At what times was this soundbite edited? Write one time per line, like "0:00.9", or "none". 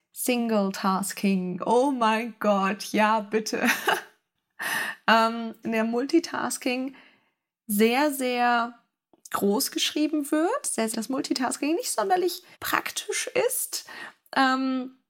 0:05.6
0:10.9
0:12.5